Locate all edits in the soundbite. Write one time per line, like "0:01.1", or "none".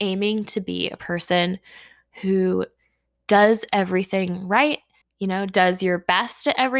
0:05.0